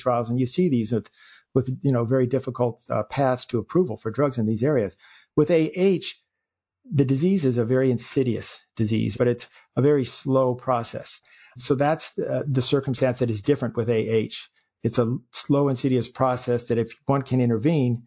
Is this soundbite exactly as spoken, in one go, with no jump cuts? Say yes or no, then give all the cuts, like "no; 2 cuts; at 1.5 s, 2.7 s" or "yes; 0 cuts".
no; 1 cut; at 9.1 s